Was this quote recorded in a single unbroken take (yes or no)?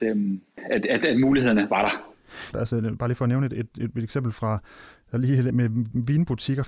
no